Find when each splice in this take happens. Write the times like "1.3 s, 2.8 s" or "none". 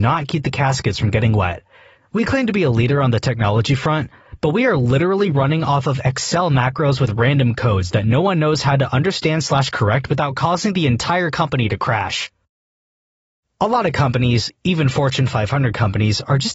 2.0 s

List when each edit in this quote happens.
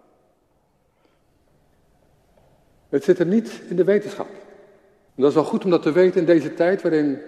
5.1 s

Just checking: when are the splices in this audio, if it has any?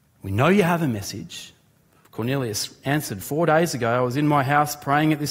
2.0 s, 3.2 s

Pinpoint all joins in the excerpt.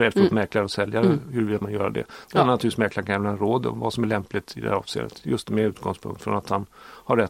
none

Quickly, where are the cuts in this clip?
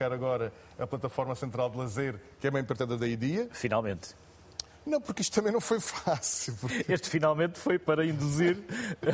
none

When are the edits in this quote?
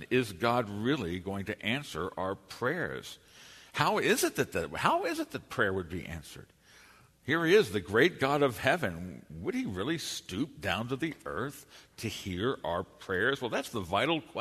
none

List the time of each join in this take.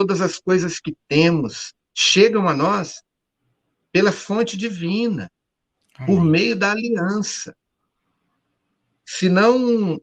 none

